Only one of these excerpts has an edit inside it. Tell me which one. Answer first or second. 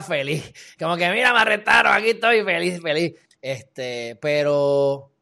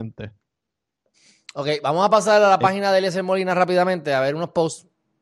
first